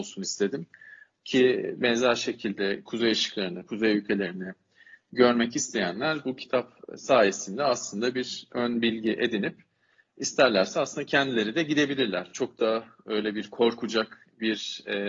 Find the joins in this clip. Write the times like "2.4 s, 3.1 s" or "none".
none